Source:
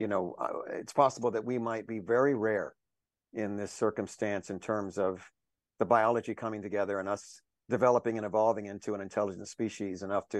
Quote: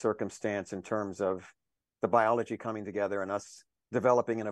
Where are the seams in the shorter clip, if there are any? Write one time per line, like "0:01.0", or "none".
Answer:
none